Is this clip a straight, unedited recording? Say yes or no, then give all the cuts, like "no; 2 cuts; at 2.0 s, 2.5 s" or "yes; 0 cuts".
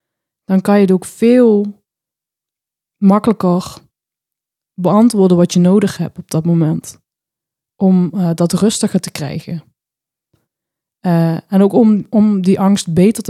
yes; 0 cuts